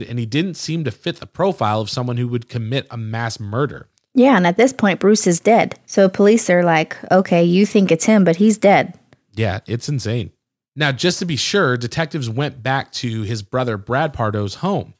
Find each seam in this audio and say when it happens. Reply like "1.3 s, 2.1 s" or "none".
none

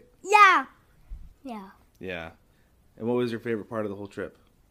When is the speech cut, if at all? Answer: 1.3 s

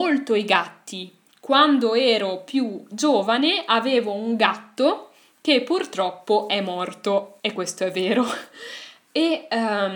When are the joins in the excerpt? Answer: 7.4 s

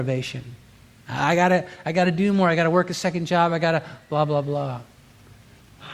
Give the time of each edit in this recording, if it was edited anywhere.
none

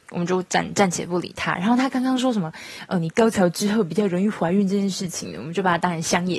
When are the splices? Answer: none

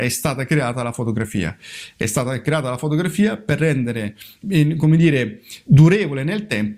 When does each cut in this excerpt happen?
4.4 s, 5.7 s

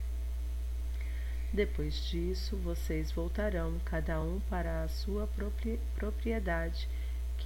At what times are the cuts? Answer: none

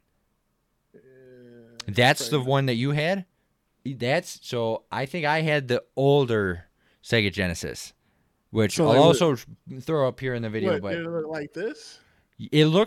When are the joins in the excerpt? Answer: 3.7 s

